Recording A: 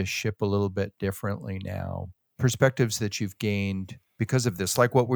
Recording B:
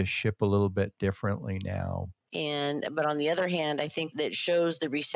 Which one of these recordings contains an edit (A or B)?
B